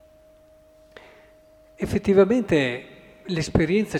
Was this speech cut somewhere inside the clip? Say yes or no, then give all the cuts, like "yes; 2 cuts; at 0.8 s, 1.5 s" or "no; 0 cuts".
no; 0 cuts